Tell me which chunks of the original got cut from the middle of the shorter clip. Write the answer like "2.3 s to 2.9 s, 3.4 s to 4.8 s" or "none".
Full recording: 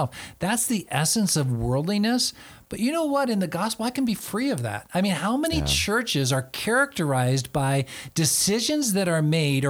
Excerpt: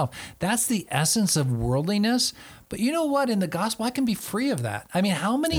none